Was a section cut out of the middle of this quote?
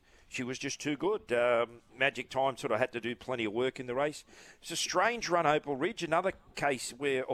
no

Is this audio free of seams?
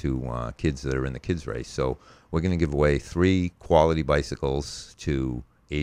yes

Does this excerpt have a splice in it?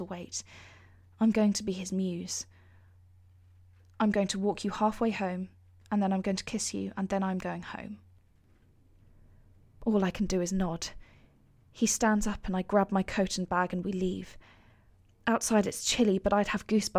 no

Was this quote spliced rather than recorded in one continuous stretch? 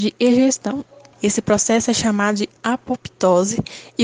yes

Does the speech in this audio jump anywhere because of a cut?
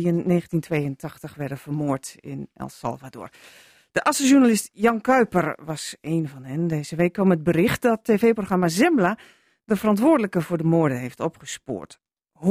no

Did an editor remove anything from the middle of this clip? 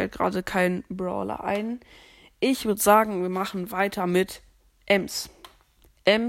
no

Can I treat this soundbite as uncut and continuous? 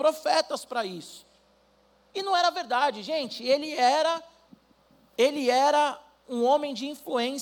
yes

